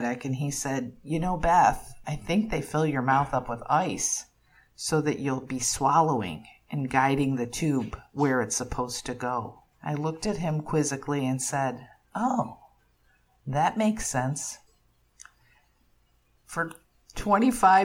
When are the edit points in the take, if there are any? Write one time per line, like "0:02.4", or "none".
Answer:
0:02.0
0:09.7